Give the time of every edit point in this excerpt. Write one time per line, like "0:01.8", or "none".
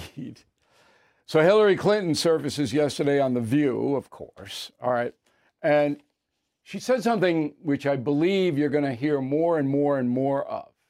none